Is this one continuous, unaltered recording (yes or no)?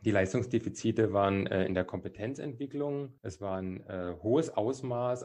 no